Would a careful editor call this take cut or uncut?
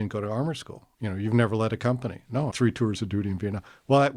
cut